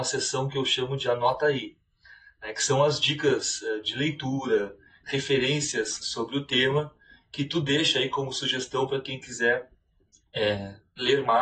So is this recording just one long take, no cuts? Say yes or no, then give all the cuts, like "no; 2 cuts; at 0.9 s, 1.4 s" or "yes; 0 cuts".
yes; 0 cuts